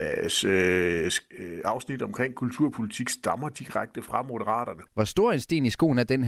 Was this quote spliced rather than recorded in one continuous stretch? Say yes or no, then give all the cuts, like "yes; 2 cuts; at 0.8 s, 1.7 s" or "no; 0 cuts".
yes; 1 cut; at 4.9 s